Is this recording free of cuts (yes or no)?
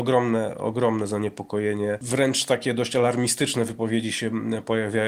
yes